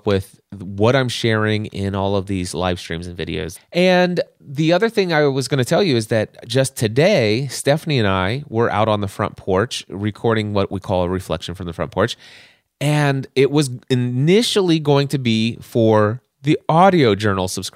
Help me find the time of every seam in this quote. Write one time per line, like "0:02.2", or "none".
0:03.6